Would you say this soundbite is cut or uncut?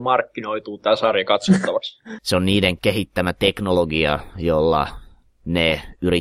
cut